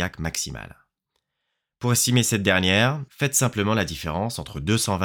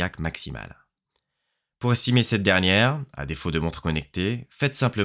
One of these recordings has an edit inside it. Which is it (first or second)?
first